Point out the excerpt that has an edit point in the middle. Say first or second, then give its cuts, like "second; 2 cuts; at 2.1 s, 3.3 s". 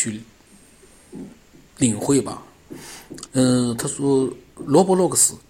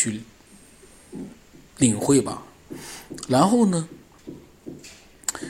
first; 1 cut; at 3.3 s